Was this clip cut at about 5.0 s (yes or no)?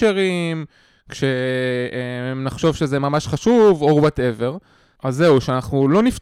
yes